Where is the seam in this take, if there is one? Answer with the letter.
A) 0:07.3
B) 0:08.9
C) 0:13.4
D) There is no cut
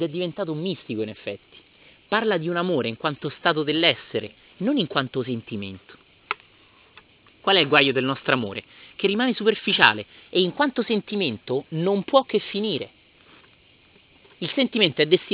D